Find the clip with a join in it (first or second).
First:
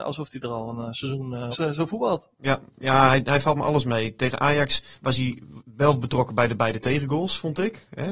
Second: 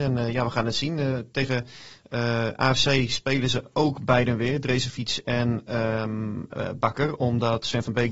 first